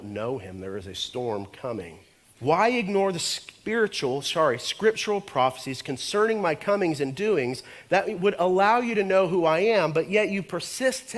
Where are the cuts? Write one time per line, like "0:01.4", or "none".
0:02.2